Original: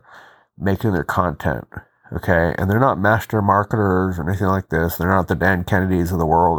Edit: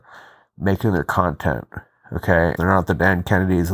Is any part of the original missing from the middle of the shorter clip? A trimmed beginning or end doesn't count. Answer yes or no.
yes